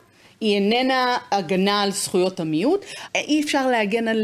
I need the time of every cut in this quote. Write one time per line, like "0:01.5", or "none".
0:03.1